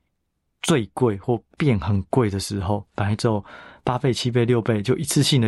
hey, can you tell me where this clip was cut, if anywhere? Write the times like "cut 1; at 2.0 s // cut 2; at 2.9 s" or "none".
cut 1; at 2.9 s

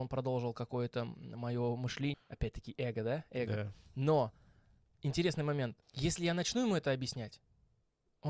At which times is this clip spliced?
cut 1; at 2.1 s // cut 2; at 5.8 s

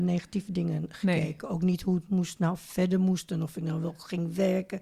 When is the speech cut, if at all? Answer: none

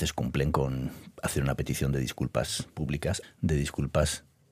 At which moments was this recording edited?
cut 1; at 3.2 s

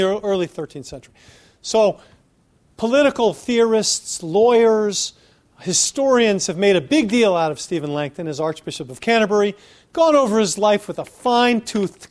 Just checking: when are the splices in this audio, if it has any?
none

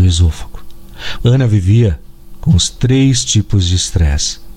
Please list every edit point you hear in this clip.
cut 1; at 1.1 s

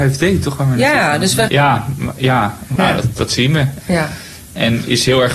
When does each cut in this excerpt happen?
cut 1; at 1.5 s // cut 2; at 2.8 s // cut 3; at 3.8 s

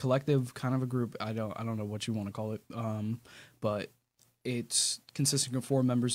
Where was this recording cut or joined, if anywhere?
none

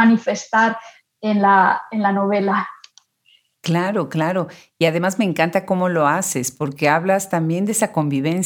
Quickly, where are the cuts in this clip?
none

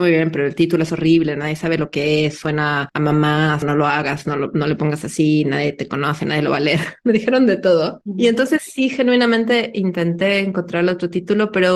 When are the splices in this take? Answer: cut 1; at 3.6 s

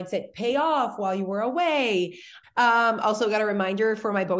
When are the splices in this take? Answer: cut 1; at 2.4 s

